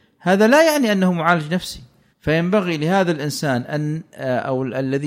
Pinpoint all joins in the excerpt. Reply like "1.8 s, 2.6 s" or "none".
2.1 s